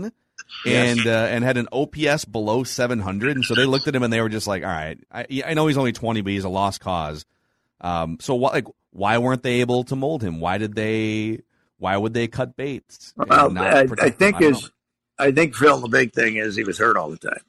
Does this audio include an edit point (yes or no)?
no